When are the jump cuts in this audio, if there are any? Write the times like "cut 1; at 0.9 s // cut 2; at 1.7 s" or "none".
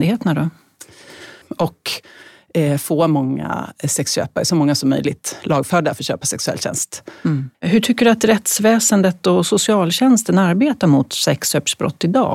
cut 1; at 1.4 s // cut 2; at 7.5 s